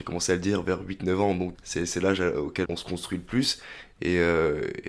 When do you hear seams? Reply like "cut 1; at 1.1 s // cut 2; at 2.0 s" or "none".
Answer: cut 1; at 1.5 s // cut 2; at 2.6 s